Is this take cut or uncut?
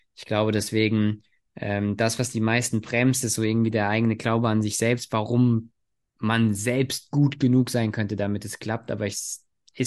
uncut